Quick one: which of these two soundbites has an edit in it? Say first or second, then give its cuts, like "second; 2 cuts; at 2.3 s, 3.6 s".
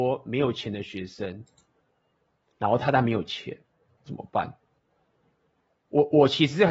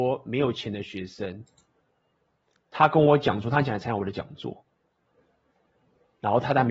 first; 2 cuts; at 2.5 s, 5.7 s